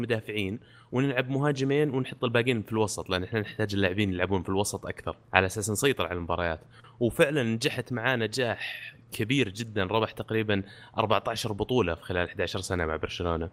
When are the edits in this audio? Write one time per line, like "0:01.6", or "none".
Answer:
0:05.2